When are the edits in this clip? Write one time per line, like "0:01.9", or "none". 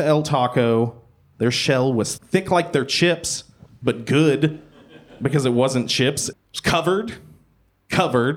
0:02.2
0:06.3